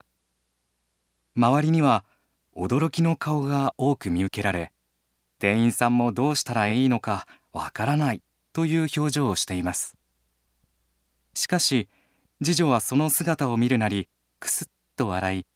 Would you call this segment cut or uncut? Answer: uncut